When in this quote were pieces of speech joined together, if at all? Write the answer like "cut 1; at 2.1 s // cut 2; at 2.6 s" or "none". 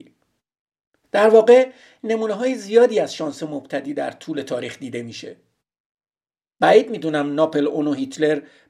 cut 1; at 1.0 s